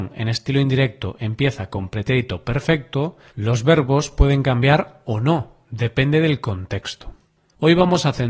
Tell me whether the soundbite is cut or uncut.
uncut